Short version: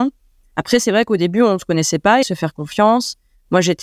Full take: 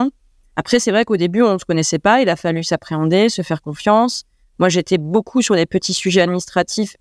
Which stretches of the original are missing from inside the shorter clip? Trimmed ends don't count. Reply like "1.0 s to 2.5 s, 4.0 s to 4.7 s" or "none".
2.2 s to 3.3 s